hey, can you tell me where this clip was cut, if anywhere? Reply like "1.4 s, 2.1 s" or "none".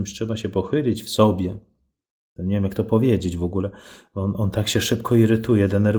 2.4 s